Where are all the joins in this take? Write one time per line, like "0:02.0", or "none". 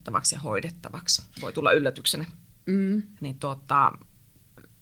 0:01.3
0:03.2

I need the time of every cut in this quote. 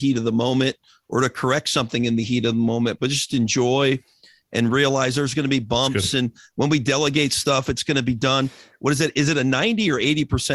none

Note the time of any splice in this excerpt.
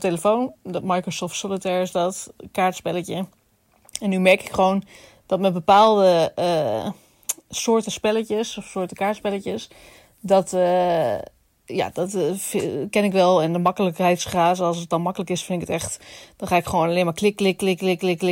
none

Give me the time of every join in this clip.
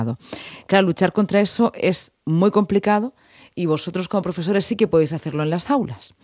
none

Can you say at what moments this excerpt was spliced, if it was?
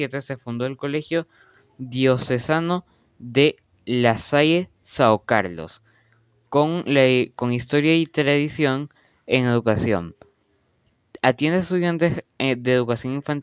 none

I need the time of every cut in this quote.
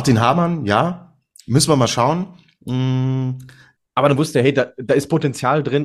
0:03.8

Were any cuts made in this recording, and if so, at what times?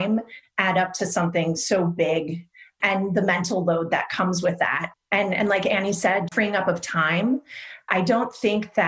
0:04.9
0:06.3

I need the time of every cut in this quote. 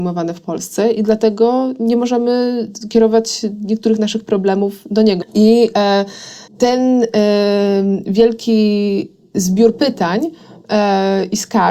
0:05.2
0:06.5

